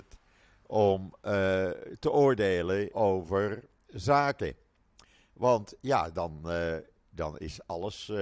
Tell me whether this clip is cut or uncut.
cut